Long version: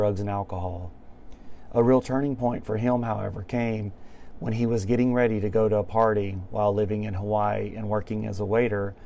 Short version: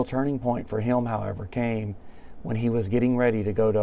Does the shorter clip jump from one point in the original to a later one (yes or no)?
no